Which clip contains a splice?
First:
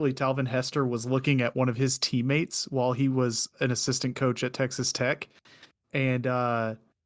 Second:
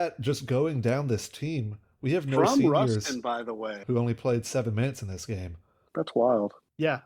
second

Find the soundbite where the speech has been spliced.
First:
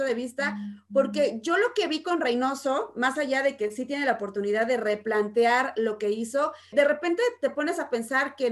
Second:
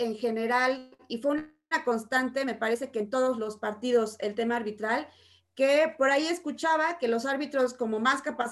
first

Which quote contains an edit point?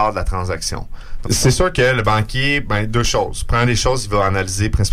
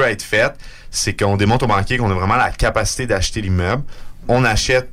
first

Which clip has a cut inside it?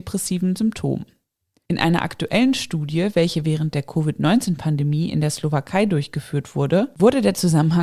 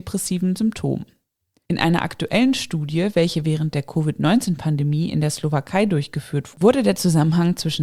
second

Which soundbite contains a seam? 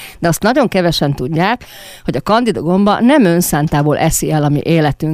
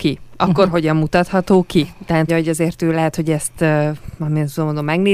second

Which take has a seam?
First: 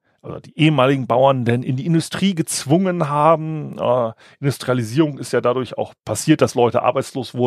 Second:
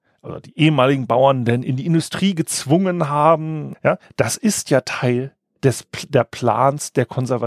second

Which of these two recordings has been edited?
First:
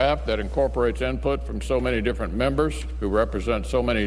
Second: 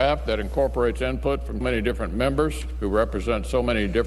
second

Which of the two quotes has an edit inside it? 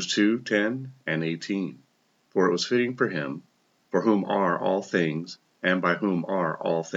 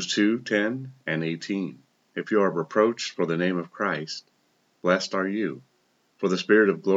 second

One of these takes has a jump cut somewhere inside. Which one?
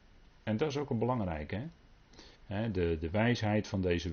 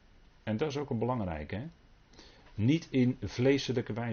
first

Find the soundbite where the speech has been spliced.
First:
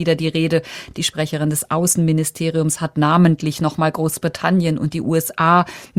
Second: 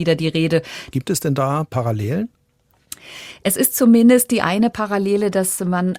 second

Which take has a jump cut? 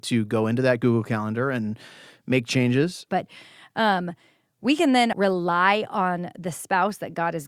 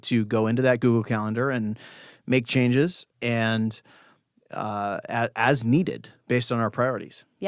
first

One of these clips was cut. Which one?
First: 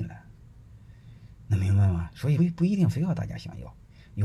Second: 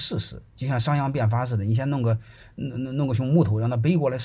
first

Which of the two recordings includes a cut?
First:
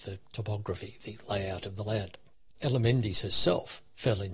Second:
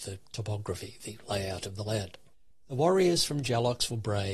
first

